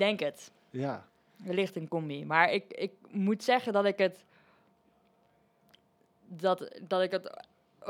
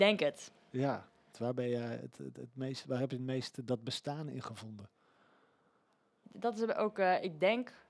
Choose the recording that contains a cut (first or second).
second